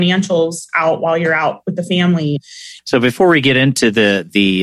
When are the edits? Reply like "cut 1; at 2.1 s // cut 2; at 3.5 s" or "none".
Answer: cut 1; at 2.8 s